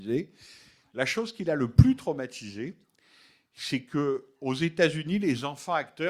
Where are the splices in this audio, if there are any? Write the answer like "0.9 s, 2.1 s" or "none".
none